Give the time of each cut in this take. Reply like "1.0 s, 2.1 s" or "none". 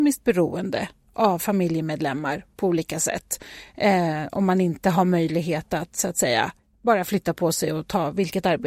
none